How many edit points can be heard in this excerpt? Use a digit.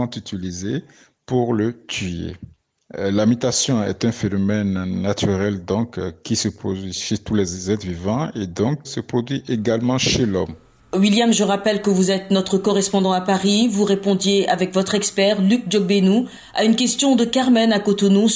1